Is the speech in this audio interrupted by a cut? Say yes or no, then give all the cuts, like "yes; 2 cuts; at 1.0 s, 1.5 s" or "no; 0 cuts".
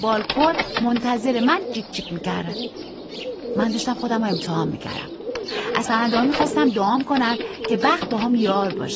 no; 0 cuts